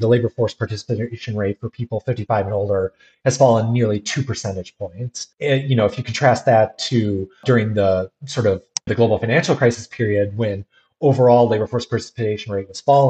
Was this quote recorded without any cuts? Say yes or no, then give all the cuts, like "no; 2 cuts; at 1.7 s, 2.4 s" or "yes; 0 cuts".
no; 2 cuts; at 5.3 s, 8.9 s